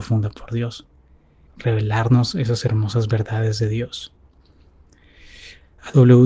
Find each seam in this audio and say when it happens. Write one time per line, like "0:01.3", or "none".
0:01.5